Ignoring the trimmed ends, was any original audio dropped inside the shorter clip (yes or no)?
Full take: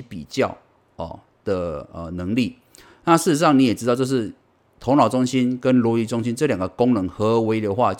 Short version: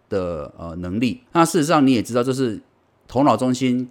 yes